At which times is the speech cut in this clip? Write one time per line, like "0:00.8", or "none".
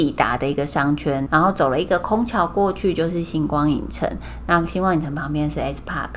0:01.3